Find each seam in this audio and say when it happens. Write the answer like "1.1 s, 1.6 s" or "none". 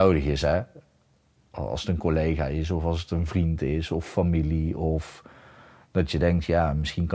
none